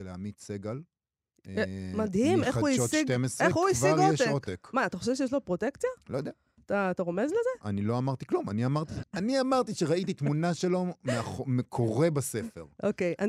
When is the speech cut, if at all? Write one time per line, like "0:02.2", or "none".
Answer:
0:09.0